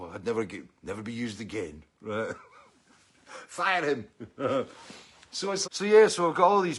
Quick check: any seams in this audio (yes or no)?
yes